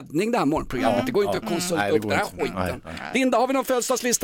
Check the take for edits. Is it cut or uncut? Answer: uncut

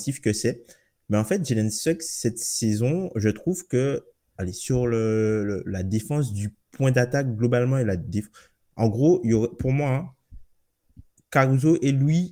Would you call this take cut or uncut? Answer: uncut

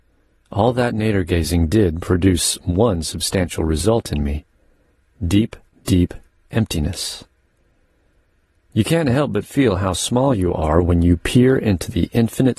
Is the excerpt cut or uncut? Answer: uncut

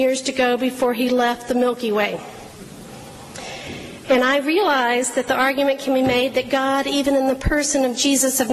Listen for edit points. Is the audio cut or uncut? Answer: uncut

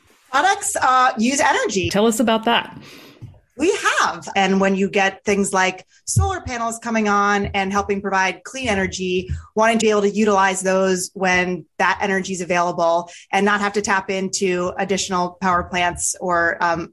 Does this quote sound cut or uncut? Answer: cut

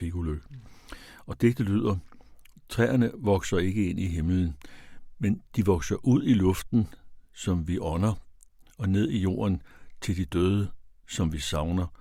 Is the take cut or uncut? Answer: uncut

